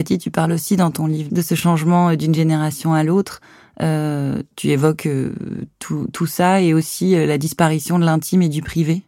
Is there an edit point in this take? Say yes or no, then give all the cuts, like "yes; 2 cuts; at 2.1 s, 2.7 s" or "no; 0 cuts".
no; 0 cuts